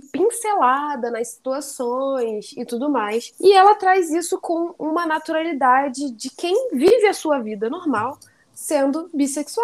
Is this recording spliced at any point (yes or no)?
no